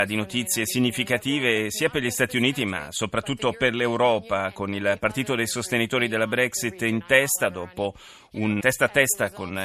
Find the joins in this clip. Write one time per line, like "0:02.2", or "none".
0:08.6